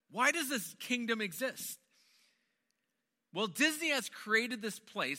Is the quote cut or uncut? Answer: uncut